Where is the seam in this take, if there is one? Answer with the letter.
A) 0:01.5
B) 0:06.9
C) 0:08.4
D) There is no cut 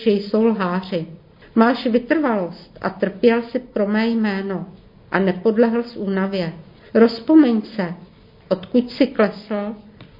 B